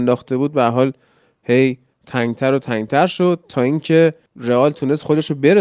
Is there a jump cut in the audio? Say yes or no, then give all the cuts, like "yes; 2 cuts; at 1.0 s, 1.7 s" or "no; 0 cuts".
no; 0 cuts